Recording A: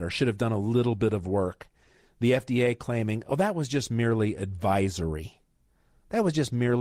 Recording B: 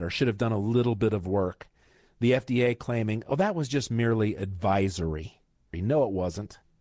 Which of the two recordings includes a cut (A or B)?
B